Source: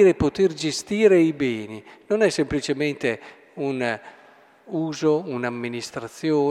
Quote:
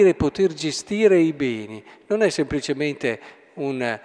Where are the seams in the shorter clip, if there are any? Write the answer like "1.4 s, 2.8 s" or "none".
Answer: none